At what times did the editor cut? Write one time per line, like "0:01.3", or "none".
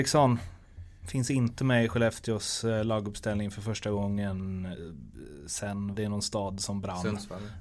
0:05.9